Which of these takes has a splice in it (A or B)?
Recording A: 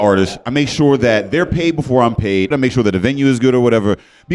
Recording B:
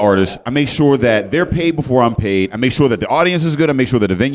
A